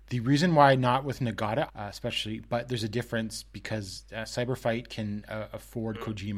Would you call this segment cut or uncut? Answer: cut